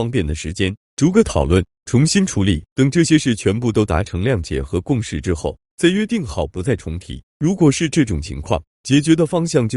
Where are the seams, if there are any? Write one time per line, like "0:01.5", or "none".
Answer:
0:02.7
0:07.3